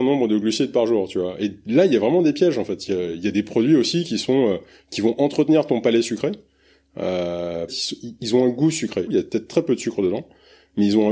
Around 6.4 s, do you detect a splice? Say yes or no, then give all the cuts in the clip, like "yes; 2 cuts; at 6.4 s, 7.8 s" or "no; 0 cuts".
no; 2 cuts; at 7.7 s, 9.1 s